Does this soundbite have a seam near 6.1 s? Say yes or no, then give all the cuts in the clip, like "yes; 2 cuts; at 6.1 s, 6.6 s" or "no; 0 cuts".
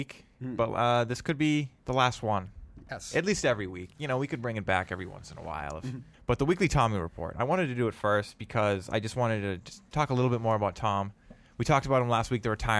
yes; 2 cuts; at 1.8 s, 6.1 s